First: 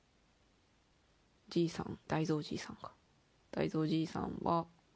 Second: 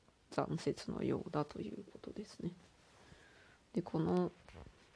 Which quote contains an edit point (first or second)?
first